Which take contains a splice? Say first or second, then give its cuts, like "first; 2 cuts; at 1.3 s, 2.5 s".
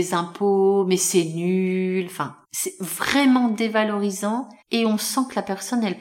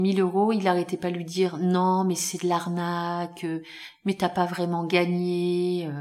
first; 2 cuts; at 2.4 s, 4.6 s